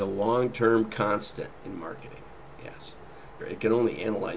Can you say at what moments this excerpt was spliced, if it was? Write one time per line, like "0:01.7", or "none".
0:03.4